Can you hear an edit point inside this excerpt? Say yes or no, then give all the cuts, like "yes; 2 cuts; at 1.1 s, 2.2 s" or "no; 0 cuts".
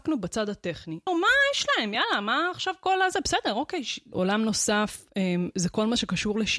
yes; 2 cuts; at 1.1 s, 4.1 s